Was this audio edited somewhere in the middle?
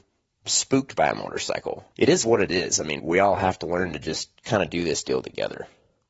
yes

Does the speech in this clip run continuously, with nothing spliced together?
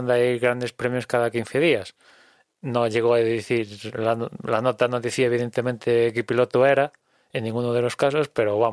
no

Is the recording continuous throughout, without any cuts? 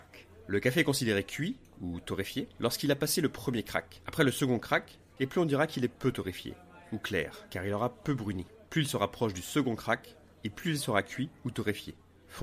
no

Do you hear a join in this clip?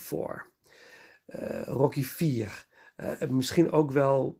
no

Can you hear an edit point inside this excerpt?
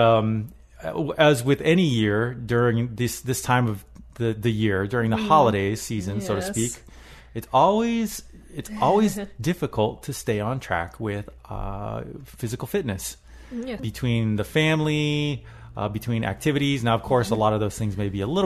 yes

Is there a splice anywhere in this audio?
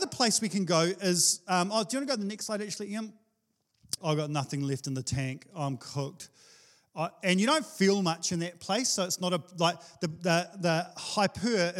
yes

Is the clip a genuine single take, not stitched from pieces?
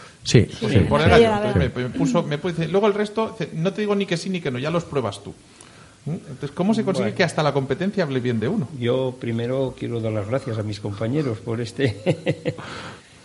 yes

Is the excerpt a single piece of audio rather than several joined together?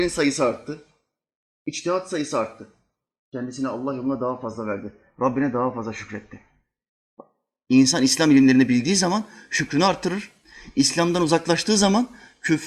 yes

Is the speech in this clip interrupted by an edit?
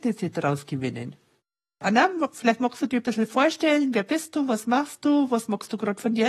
no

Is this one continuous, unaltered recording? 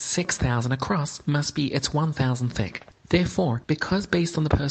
no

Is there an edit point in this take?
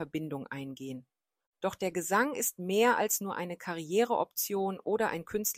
no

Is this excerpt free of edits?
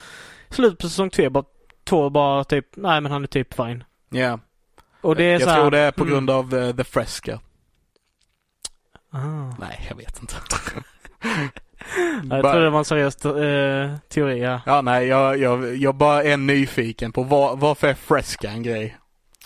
yes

